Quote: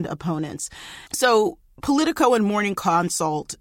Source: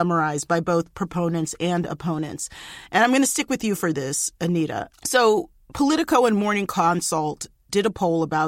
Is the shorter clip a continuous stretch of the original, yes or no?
no